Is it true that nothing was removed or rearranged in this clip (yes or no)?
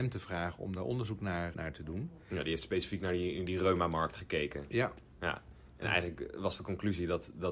no